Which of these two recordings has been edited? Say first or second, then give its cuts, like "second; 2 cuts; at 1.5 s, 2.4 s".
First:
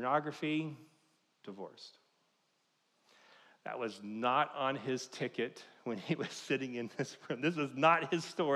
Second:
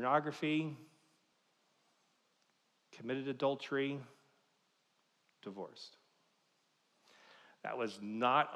first; 1 cut; at 1.3 s